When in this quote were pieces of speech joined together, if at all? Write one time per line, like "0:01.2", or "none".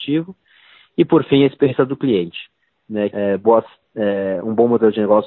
0:03.1